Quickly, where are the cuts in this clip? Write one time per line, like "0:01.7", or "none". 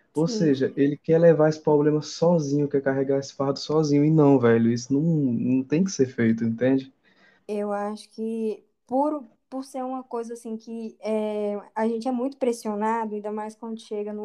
0:07.4